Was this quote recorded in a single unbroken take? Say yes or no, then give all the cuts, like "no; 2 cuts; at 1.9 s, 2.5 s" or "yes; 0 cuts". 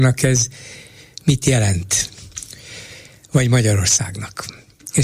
yes; 0 cuts